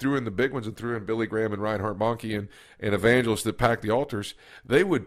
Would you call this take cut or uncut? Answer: uncut